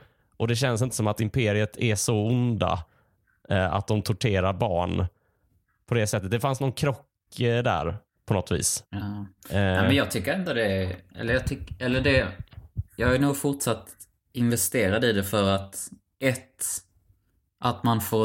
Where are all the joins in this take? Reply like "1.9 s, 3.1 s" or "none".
none